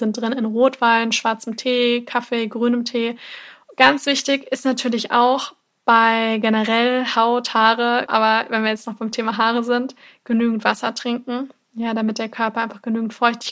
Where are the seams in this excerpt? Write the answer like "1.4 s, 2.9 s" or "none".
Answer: 3.6 s, 8.1 s